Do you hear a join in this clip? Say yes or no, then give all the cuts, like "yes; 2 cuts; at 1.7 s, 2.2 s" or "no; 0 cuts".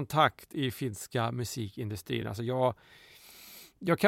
no; 0 cuts